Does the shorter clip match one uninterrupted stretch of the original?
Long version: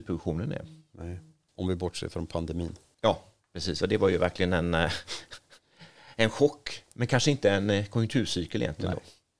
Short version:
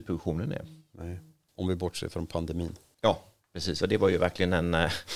yes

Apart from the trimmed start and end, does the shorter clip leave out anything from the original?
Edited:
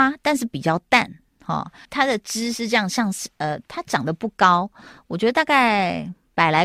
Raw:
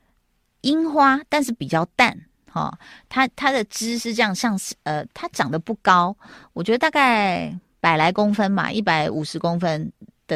yes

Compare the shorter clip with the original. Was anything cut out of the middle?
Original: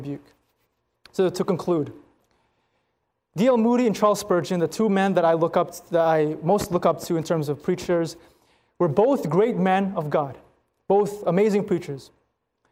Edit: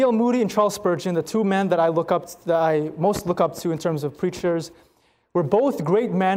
no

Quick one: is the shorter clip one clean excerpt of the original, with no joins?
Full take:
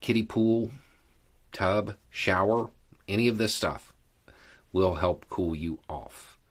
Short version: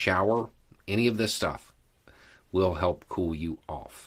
yes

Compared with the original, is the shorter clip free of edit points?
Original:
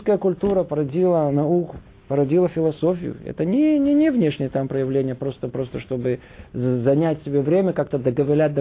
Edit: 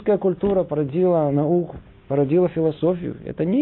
yes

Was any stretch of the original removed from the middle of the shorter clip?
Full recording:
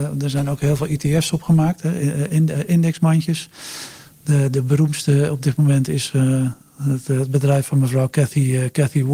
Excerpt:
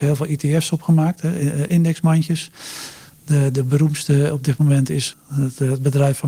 yes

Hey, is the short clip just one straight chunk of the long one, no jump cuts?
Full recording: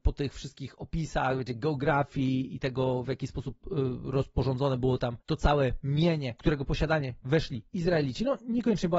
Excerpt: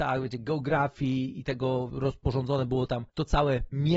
no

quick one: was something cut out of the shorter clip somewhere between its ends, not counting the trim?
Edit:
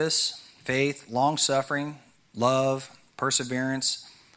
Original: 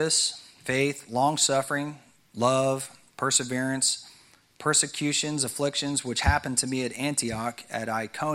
no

